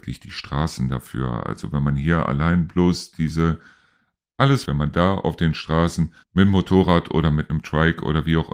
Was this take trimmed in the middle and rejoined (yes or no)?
yes